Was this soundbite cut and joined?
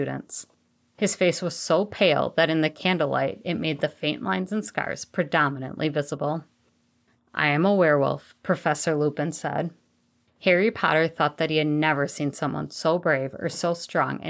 no; 0 cuts

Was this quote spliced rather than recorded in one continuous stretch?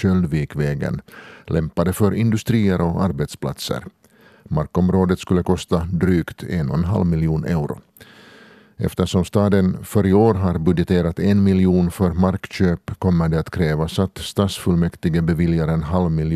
no; 0 cuts

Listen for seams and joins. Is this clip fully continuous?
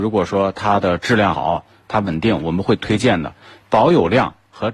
yes; 0 cuts

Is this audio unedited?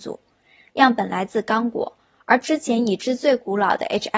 yes; 0 cuts

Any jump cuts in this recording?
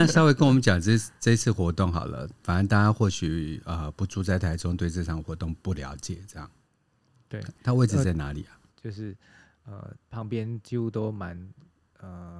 yes; 3 cuts; at 2.4 s, 8.7 s, 10.0 s

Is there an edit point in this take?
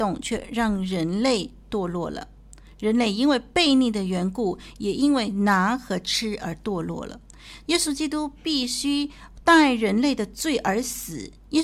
yes; 1 cut; at 7.6 s

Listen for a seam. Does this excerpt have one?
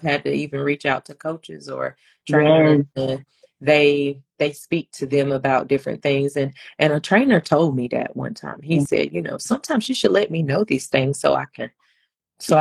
no; 0 cuts

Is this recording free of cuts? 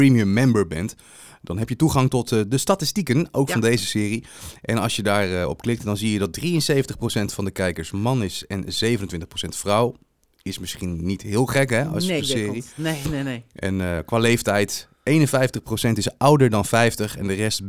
no; 1 cut; at 12.2 s

